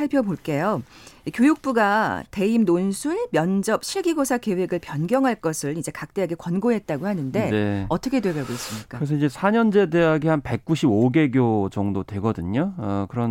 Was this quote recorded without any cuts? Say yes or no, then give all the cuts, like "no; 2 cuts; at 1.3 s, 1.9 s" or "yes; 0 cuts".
yes; 0 cuts